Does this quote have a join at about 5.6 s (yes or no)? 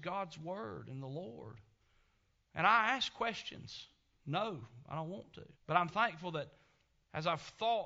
yes